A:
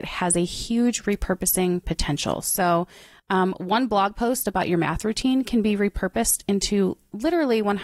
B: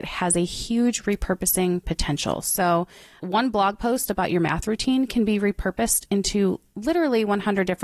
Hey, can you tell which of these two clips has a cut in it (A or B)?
B